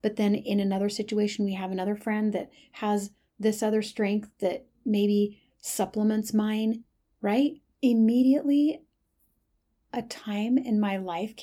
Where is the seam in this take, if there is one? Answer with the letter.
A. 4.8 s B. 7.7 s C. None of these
B